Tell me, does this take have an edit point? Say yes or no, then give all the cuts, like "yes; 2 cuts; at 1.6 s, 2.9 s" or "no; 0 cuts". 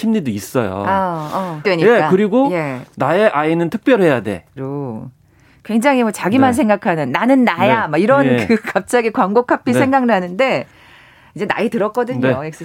yes; 2 cuts; at 1.6 s, 4.6 s